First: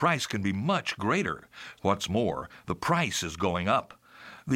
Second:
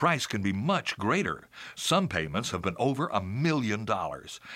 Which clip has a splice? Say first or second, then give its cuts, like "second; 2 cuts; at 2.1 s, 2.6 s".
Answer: first; 1 cut; at 1.8 s